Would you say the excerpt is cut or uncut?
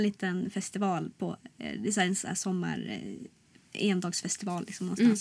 uncut